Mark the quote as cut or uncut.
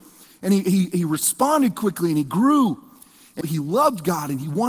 cut